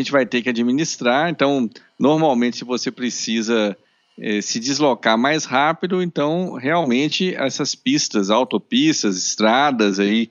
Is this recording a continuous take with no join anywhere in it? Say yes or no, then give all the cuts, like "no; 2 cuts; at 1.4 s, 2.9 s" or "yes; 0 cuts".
yes; 0 cuts